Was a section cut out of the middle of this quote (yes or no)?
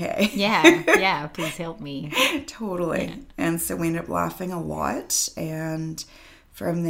no